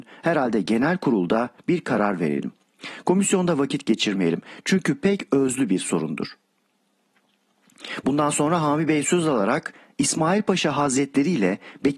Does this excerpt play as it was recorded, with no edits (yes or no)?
yes